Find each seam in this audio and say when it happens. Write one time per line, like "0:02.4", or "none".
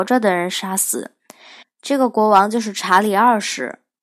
0:01.6